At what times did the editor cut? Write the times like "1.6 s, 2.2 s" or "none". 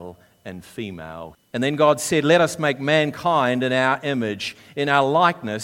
1.3 s